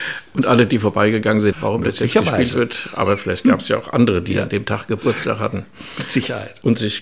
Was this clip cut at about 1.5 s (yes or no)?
yes